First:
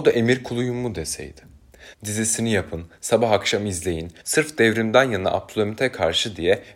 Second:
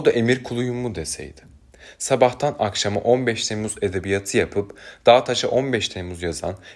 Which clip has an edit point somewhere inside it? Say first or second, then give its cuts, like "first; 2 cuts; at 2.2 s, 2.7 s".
first; 2 cuts; at 1.9 s, 4.2 s